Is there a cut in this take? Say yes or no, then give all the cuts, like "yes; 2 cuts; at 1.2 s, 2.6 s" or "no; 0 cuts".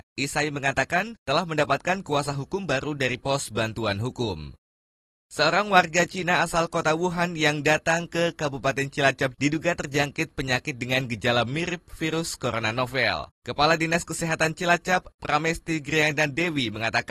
yes; 1 cut; at 9.3 s